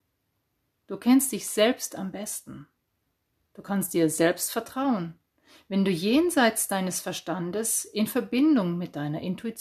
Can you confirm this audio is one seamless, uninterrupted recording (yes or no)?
yes